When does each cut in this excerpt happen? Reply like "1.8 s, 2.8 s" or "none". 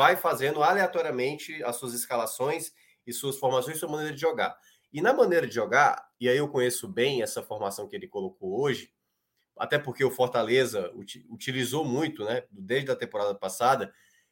none